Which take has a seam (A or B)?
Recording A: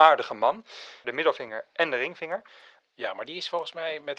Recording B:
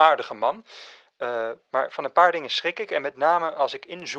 A